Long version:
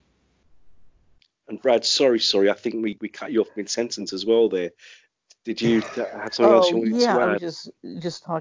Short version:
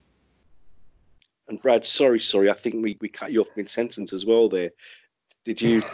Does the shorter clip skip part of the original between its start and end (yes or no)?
no